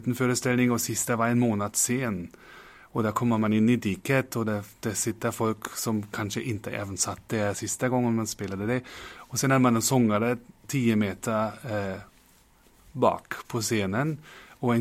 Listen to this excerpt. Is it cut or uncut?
uncut